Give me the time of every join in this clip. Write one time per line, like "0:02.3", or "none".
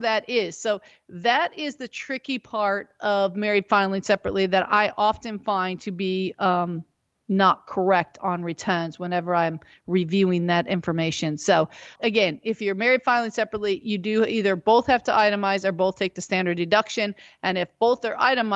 0:12.0